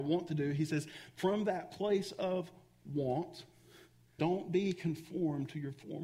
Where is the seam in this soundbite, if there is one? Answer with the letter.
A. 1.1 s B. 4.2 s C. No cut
B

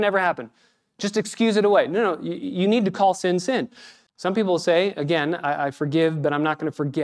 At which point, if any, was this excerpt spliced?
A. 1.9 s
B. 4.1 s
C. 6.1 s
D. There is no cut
B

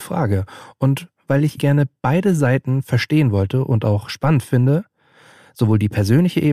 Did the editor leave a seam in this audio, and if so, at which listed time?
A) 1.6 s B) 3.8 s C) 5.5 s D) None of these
A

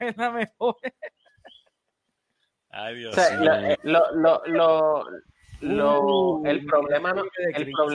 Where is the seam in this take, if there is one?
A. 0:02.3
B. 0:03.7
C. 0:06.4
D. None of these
B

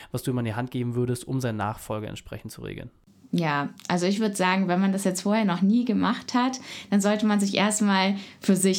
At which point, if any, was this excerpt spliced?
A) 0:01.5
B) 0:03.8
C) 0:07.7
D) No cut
D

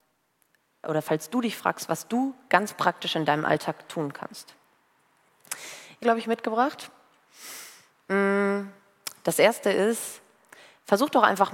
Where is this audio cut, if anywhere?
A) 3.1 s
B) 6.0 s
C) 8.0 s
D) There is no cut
B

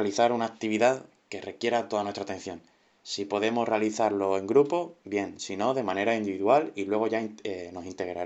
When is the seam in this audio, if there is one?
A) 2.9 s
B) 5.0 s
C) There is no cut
A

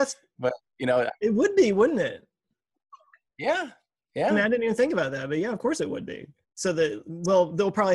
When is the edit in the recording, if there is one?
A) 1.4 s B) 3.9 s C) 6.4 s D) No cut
C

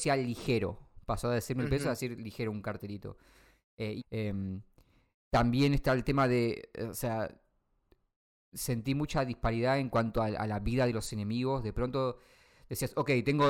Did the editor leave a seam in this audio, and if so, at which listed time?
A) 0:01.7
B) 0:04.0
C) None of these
B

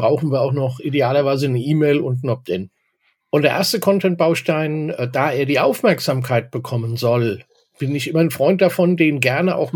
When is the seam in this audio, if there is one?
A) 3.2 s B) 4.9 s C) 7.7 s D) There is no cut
A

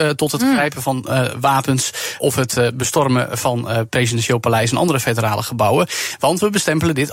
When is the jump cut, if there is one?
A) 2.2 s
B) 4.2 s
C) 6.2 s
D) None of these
A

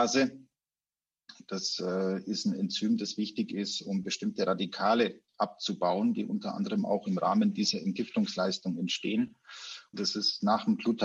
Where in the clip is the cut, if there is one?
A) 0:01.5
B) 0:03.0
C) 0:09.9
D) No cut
C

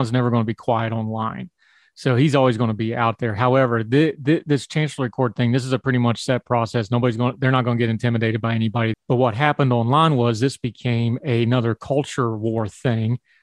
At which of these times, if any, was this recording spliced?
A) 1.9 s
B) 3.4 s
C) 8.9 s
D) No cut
C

